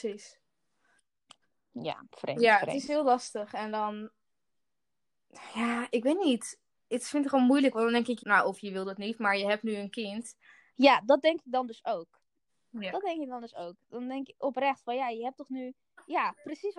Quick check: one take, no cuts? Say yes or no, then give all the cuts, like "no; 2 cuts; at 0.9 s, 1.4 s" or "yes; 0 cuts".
no; 2 cuts; at 8.2 s, 10.7 s